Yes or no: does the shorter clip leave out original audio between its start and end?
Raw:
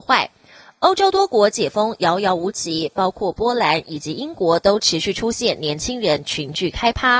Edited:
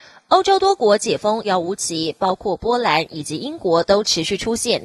yes